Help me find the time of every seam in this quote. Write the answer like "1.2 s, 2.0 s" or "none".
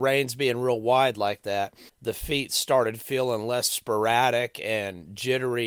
1.9 s